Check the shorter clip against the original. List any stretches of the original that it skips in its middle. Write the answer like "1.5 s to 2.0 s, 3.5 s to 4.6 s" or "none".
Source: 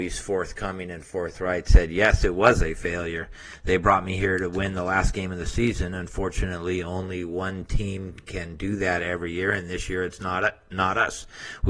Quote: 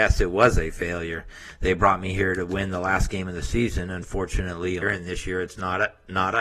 6.8 s to 9.4 s